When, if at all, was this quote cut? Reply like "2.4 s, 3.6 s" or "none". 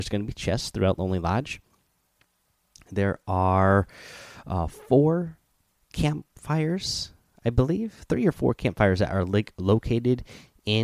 none